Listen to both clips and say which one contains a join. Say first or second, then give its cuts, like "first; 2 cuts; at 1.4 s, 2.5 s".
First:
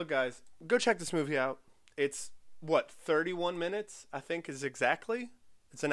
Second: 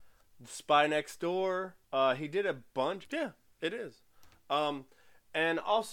second; 2 cuts; at 1.8 s, 3.0 s